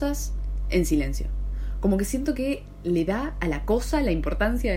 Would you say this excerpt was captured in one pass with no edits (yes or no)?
yes